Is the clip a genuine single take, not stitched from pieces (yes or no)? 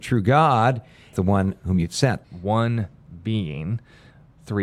no